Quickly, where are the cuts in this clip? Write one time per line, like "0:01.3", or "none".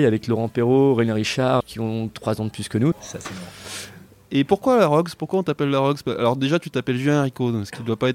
0:01.6
0:02.9